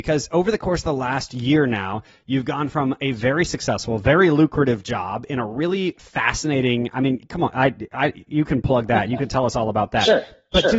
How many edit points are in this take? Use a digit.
0